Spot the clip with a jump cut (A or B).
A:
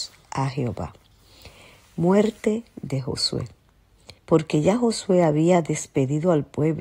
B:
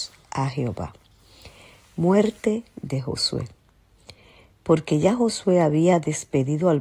A